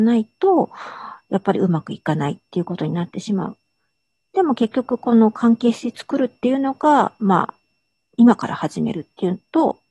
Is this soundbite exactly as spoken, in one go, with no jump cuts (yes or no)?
yes